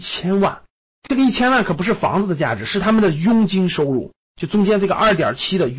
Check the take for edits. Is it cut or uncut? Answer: uncut